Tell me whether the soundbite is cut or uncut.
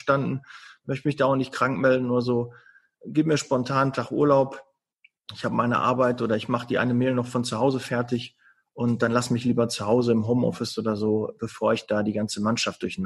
uncut